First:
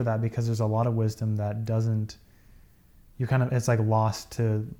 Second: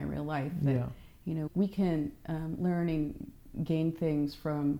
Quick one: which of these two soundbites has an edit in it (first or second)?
second